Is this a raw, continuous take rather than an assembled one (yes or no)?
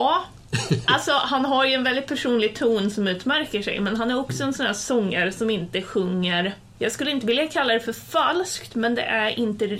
yes